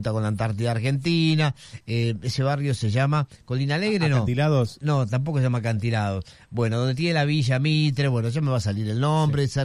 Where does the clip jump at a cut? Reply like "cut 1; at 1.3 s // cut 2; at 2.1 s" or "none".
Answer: none